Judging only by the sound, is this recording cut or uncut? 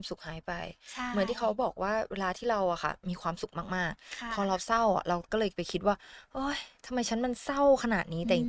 cut